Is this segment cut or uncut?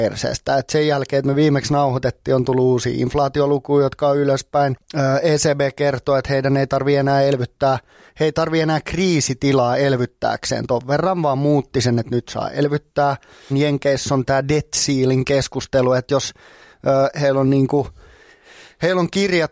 cut